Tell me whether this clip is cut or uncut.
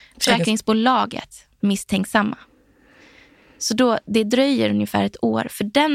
uncut